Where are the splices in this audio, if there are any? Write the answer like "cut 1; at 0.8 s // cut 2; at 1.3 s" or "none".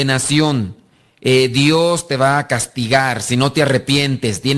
none

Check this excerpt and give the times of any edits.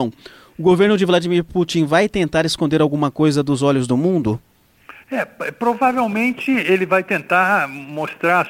cut 1; at 5.0 s

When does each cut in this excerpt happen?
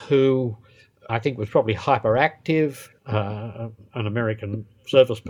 cut 1; at 1.1 s // cut 2; at 3.0 s

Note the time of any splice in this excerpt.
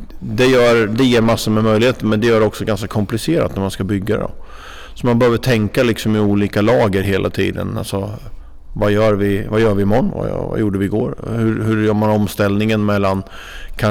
cut 1; at 10.1 s

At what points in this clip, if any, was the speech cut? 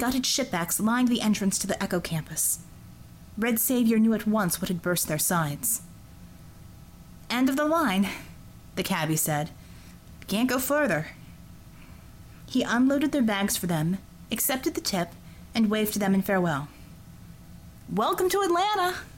none

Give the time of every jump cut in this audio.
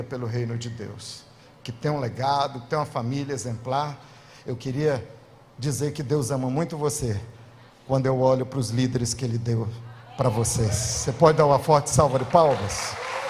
none

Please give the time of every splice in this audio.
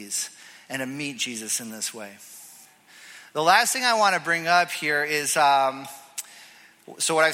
none

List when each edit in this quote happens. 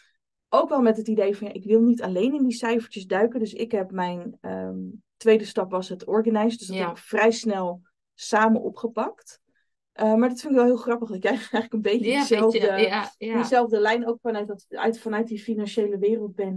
none

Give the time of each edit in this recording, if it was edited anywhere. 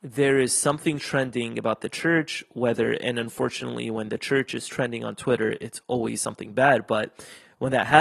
none

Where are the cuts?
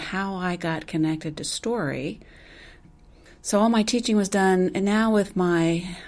none

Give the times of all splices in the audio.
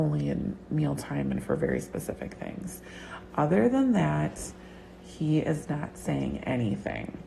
none

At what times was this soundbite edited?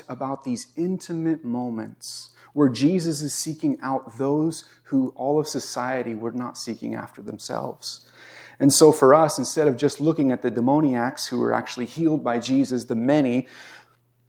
none

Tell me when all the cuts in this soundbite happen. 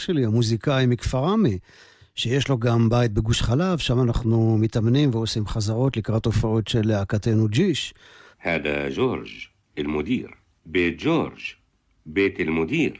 cut 1; at 8.3 s // cut 2; at 10.6 s

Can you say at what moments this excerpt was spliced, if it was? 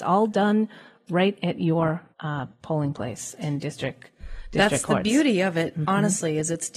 cut 1; at 2.1 s

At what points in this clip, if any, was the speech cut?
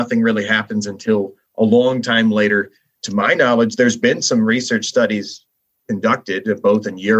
cut 1; at 3.0 s

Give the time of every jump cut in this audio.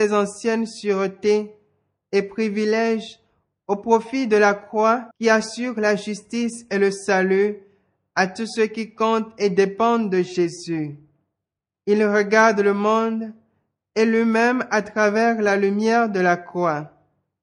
cut 1; at 5.1 s // cut 2; at 11.7 s

